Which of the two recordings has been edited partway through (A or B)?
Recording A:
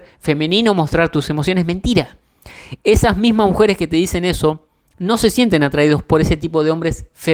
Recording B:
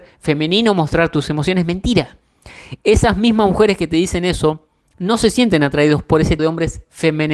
B